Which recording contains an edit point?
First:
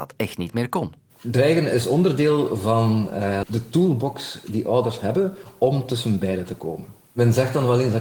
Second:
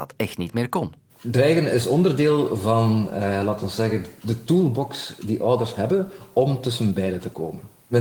first; 1 cut; at 3.4 s

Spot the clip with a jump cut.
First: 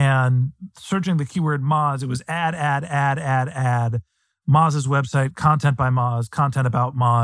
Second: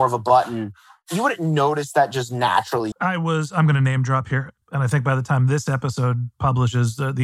second; 2 cuts; at 2.9 s, 4.6 s

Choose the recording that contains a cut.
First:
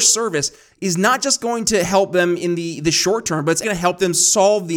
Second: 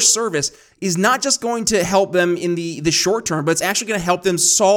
first; 1 cut; at 3.6 s

